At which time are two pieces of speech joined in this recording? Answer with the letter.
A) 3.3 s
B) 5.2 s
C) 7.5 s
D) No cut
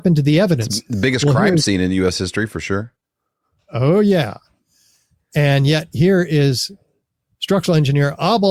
D